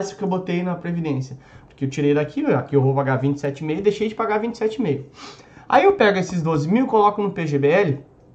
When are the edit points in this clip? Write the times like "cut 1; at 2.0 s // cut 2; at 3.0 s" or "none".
cut 1; at 1.6 s